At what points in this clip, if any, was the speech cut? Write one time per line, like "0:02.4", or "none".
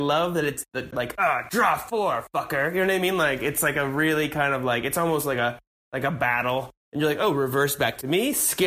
0:00.9